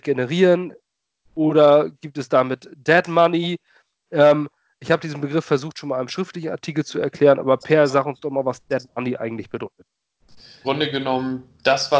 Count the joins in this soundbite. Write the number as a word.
one